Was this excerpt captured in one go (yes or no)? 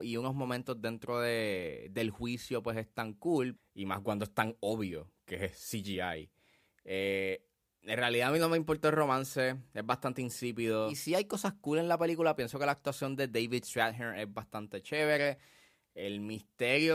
no